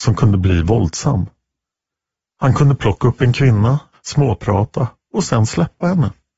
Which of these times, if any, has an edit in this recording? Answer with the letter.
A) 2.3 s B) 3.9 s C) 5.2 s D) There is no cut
B